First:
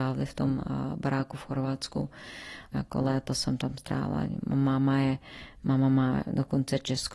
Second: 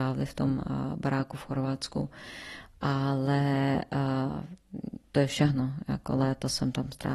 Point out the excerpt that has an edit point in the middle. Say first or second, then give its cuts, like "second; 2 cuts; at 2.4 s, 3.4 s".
first; 1 cut; at 2.7 s